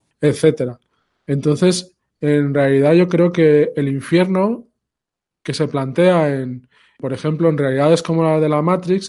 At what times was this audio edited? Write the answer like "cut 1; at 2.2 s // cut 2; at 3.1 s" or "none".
none